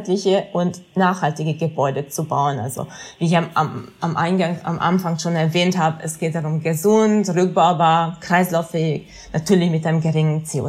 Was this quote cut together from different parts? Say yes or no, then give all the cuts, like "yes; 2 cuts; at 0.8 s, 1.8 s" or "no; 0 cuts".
no; 0 cuts